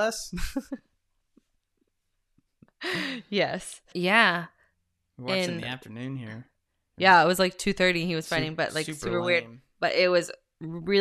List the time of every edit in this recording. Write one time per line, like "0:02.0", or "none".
0:03.9